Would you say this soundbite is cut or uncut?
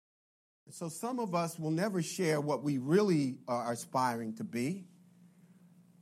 uncut